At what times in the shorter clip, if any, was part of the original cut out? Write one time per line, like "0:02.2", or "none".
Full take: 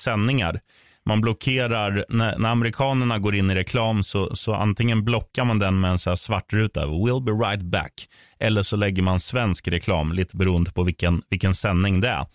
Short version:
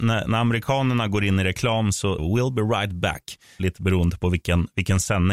0:02.2
0:03.6